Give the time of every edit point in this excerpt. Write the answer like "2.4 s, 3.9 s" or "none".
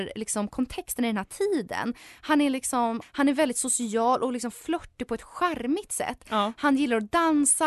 3.0 s

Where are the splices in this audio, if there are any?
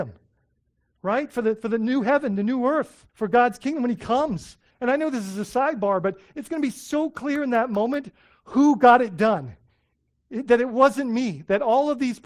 3.1 s, 4.7 s

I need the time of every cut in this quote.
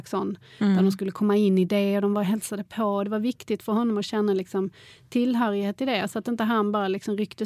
none

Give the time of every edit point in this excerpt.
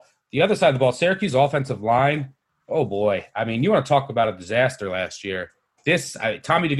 none

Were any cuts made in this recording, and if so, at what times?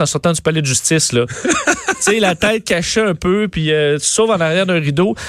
none

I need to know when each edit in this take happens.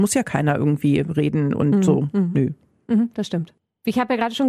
none

